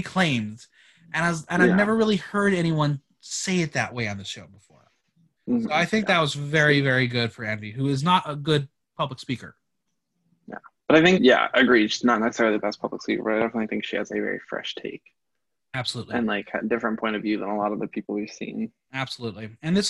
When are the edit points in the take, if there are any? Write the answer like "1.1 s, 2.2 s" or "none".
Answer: 11.2 s